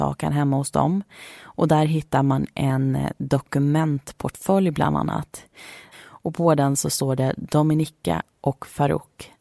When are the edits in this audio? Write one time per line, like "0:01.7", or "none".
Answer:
0:05.9